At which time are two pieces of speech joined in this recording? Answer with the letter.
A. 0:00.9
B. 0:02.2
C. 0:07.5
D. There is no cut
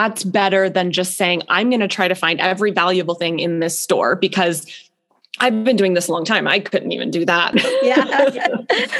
C